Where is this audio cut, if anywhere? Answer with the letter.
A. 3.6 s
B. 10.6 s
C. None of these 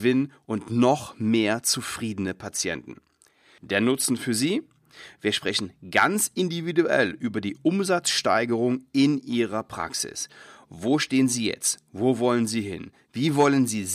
A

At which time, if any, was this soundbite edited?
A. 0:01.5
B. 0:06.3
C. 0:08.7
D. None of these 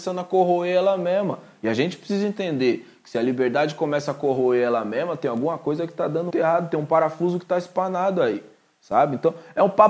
B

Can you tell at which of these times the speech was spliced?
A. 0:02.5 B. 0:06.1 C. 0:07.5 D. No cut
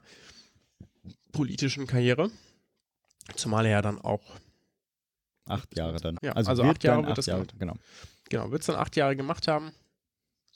B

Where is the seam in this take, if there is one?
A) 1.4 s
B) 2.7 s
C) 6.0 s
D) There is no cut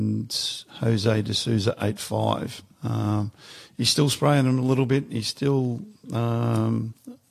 D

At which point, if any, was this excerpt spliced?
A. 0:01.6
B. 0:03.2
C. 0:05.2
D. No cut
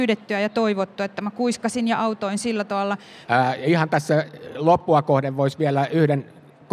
B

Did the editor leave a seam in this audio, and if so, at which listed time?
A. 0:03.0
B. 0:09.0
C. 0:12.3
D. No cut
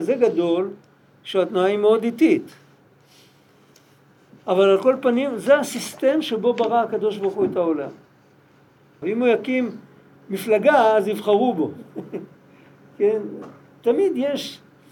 B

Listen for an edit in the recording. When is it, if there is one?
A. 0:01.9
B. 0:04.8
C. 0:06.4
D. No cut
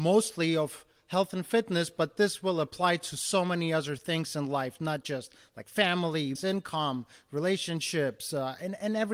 C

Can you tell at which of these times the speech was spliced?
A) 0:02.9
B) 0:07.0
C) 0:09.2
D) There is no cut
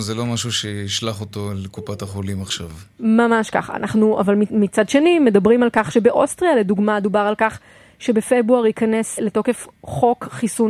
C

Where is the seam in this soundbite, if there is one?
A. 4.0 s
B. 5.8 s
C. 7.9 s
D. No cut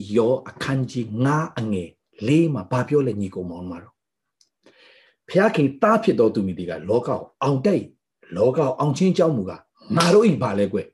D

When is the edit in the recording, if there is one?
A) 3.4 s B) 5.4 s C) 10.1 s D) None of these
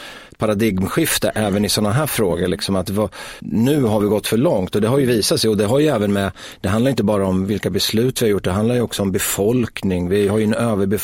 A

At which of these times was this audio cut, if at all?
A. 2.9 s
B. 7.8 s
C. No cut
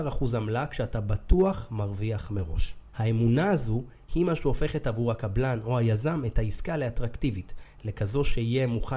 A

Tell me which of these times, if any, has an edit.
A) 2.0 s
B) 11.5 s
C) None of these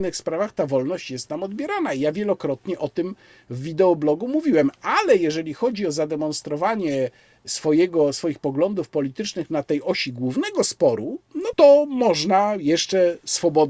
B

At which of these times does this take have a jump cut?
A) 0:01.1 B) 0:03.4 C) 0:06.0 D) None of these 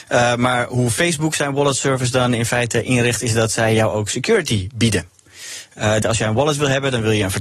C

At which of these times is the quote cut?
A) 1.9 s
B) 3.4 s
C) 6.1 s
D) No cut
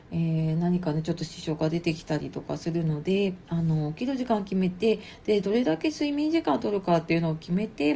B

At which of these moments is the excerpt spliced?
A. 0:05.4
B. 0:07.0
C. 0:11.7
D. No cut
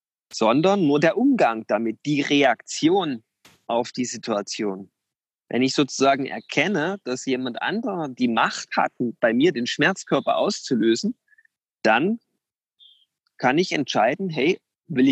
A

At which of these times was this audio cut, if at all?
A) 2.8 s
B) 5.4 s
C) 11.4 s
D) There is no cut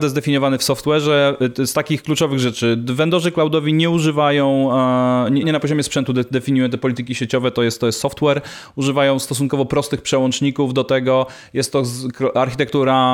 B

